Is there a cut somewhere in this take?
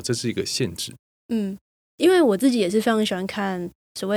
no; 0 cuts

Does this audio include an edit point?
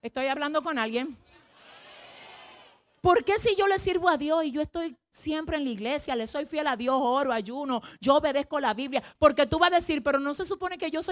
yes; 1 cut; at 9.2 s

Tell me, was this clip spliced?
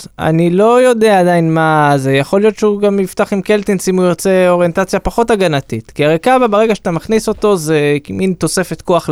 no; 0 cuts

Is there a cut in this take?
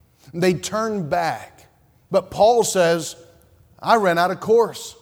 yes; 1 cut; at 2.1 s

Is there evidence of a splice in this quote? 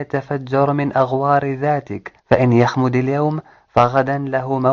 yes; 1 cut; at 2.2 s

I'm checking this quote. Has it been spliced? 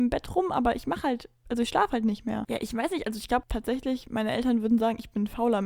yes; 1 cut; at 2.5 s

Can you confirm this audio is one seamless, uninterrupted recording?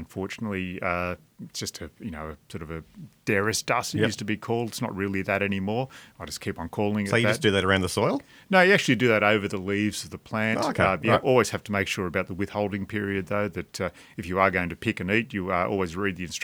yes; 0 cuts

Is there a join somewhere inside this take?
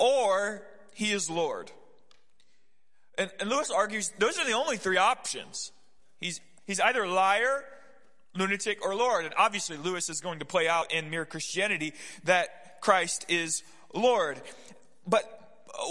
no; 0 cuts

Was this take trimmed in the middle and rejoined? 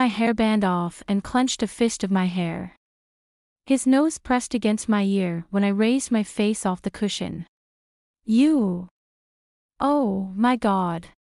yes; 1 cut; at 8.1 s

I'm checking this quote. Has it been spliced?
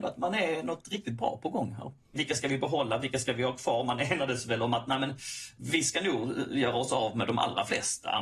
yes; 1 cut; at 2.2 s

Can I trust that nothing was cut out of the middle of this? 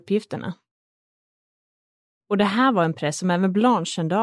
no; 1 cut; at 2.2 s

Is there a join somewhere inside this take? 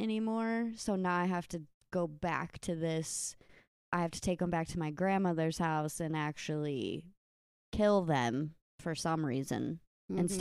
no; 0 cuts

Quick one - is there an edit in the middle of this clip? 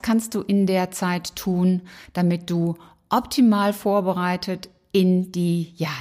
no; 0 cuts

